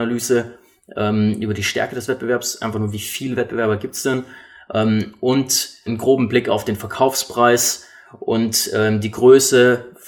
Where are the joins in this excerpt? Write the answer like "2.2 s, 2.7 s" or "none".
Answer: 5.9 s